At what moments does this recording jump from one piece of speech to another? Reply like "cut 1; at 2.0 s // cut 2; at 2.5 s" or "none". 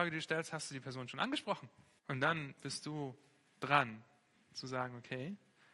cut 1; at 2.0 s